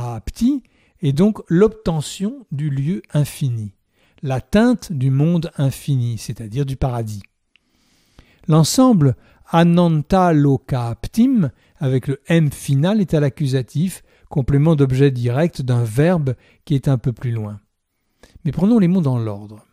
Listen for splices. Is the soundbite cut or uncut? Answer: uncut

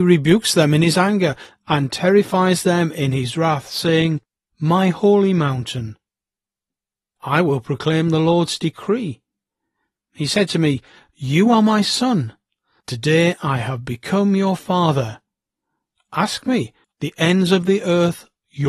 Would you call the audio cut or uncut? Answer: cut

